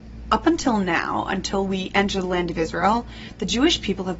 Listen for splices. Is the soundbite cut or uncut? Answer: uncut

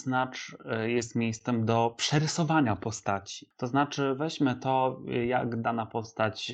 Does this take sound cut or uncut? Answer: uncut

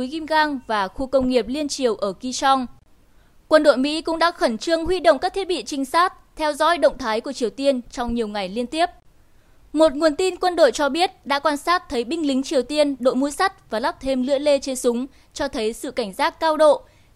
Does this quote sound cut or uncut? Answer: uncut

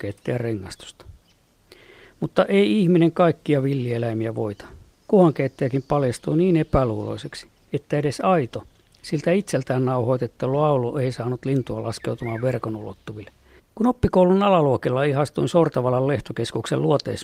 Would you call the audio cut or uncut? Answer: cut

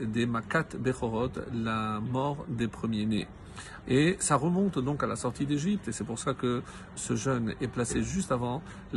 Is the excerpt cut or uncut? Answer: cut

